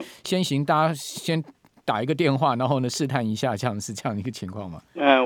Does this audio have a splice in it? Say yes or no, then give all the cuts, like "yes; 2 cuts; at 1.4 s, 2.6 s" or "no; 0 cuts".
no; 0 cuts